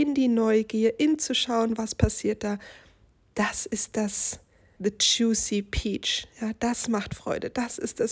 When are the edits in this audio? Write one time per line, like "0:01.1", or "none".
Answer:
0:04.8